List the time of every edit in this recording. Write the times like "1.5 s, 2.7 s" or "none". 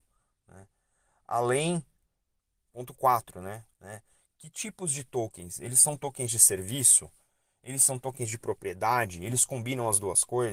3.7 s